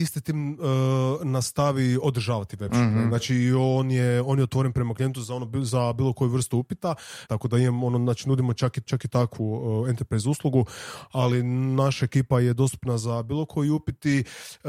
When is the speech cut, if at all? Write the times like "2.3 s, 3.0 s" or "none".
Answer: 7.2 s, 8.9 s